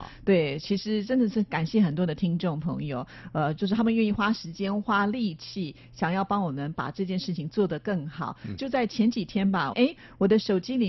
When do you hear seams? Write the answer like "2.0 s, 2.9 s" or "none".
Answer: 8.6 s, 9.7 s